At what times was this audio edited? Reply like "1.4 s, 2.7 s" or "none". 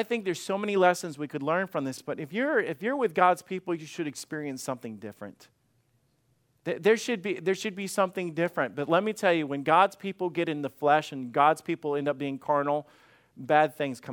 none